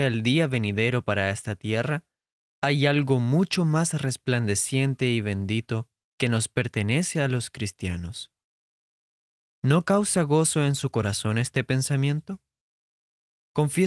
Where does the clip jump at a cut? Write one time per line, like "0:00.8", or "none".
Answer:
0:09.4